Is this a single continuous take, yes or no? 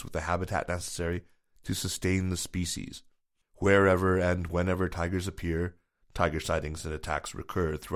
no